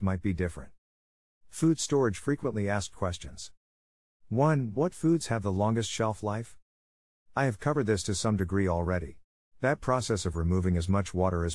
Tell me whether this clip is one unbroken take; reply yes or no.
no